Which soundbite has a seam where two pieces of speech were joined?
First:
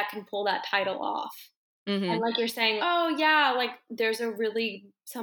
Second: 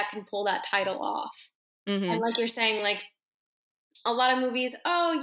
first; 1 cut; at 2.8 s

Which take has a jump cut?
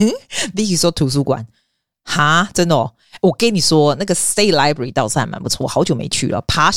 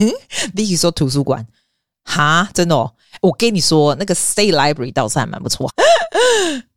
second; 1 cut; at 5.7 s

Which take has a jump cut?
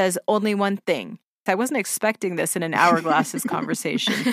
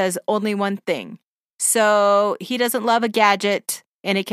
first; 1 cut; at 1.5 s

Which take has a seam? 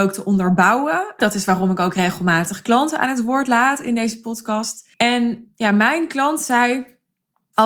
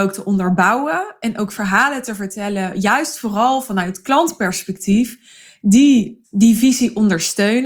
first; 2 cuts; at 1.2 s, 4.9 s

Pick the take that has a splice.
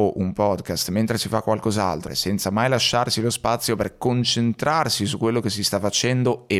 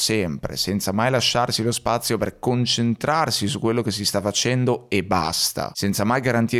first; 1 cut; at 2.1 s

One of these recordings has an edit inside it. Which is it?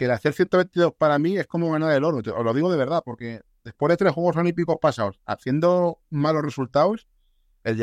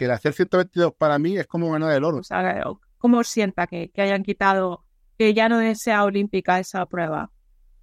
second; 1 cut; at 2.2 s

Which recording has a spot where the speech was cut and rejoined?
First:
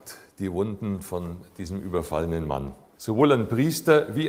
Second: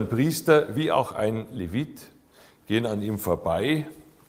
first; 1 cut; at 2.9 s

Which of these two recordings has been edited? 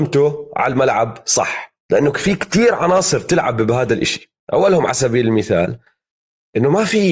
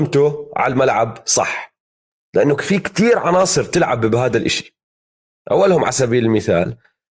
first; 2 cuts; at 1.8 s, 4.4 s

